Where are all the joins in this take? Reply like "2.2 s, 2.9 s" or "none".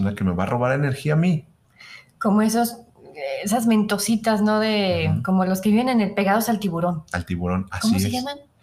none